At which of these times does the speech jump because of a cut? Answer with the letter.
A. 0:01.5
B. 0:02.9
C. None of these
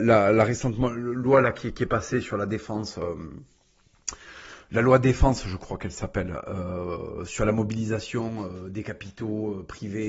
C